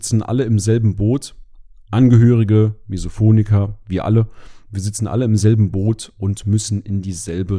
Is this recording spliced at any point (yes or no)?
no